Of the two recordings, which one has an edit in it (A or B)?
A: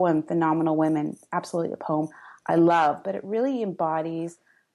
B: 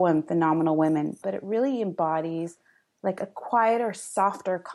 B